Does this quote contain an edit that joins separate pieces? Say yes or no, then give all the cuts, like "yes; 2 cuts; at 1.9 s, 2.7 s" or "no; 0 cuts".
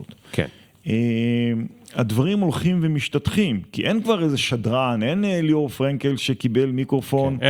no; 0 cuts